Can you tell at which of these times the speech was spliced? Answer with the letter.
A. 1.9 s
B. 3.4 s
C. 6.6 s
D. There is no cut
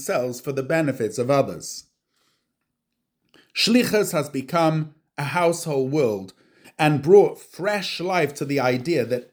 C